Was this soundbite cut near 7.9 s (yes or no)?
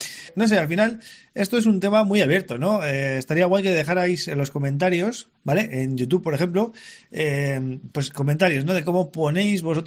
no